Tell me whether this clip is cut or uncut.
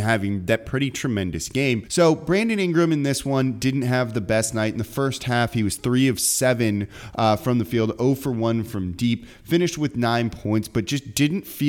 cut